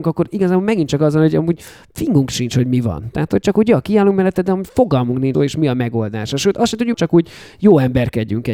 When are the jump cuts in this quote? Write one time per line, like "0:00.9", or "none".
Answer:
0:05.3
0:06.9